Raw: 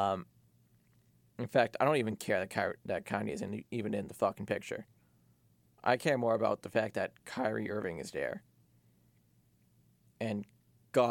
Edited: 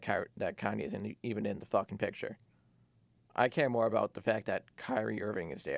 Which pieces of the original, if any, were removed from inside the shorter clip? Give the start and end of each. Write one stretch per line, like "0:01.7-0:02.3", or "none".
none